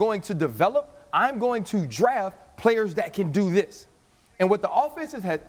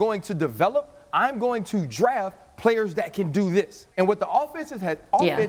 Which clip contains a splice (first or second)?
second